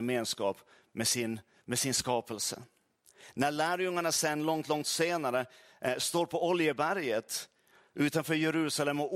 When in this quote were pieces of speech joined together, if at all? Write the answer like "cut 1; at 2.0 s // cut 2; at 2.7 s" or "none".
none